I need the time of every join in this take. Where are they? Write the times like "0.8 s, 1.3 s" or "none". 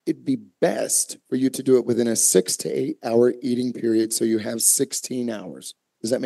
none